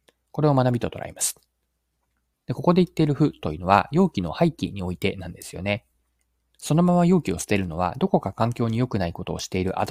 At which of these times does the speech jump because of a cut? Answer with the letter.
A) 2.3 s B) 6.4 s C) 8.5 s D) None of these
A